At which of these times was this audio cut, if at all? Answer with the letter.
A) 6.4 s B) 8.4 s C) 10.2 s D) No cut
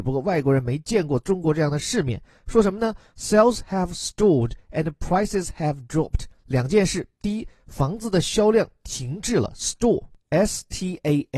D